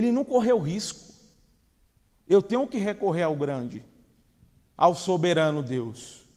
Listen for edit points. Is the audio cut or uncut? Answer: cut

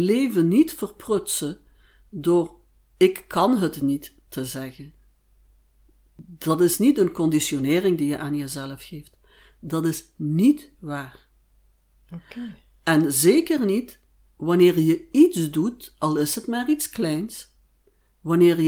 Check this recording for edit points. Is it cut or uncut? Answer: uncut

